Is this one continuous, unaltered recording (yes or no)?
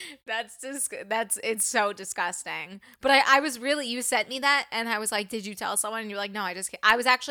yes